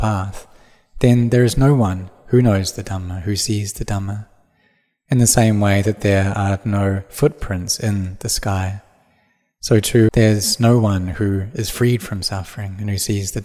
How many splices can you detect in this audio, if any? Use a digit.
1